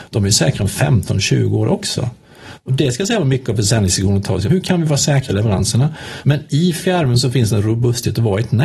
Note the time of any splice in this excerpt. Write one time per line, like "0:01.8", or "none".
0:04.5
0:06.2

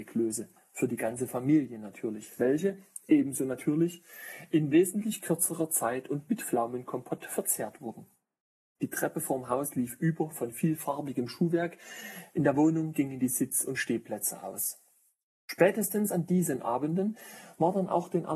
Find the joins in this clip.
0:08.8

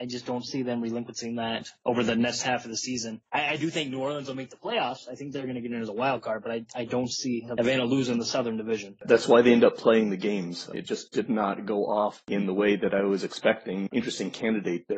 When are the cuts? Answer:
0:10.7
0:13.9

